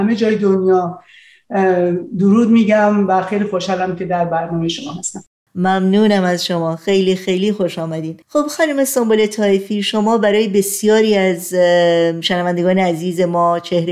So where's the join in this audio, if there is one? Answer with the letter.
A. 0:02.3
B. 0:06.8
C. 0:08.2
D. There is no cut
C